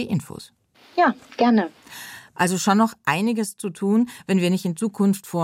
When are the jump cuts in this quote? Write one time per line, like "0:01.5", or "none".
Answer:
0:02.3